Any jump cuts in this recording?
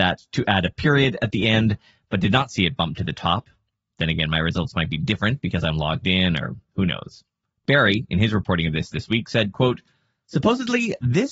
no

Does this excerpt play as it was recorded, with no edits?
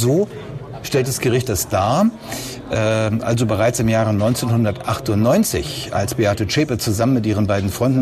yes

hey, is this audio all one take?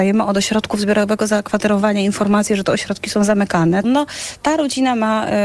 no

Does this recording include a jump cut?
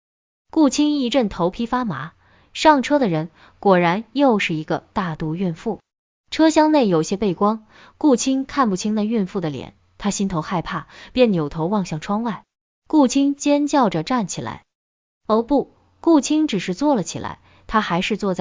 yes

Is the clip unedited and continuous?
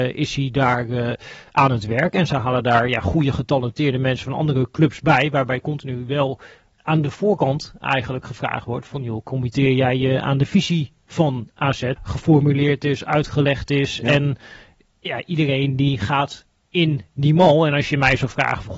no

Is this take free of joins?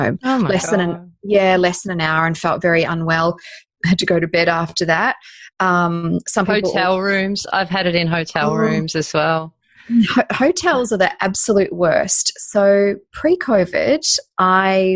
yes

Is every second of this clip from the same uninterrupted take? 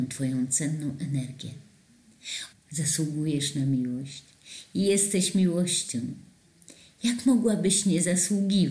no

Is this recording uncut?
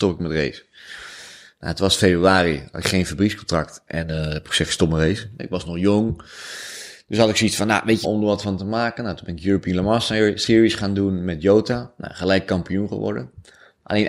no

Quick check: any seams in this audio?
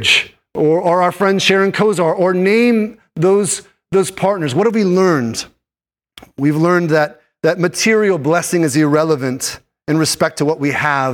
no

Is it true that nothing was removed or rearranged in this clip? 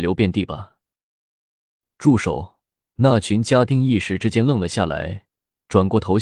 no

